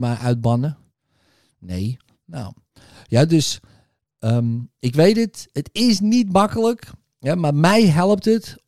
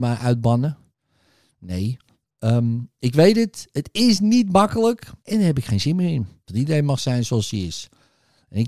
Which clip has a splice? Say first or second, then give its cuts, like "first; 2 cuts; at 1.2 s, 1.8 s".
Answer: second; 3 cuts; at 2.2 s, 5.2 s, 6.5 s